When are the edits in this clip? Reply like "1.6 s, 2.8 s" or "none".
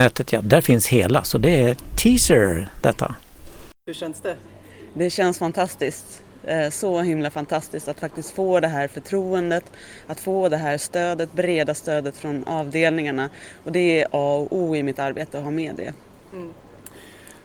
none